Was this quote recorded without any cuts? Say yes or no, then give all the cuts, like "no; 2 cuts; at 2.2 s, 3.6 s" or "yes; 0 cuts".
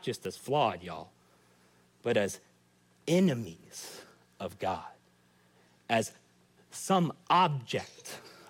yes; 0 cuts